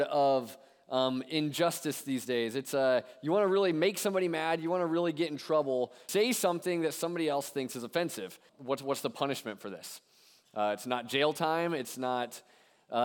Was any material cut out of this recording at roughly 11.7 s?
no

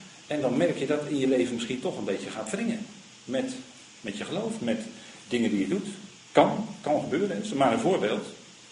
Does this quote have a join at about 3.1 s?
no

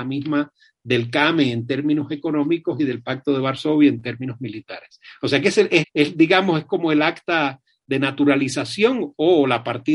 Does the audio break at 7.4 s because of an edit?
no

